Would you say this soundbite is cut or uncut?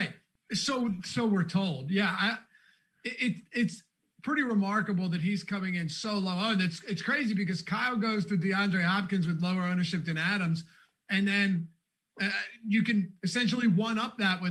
uncut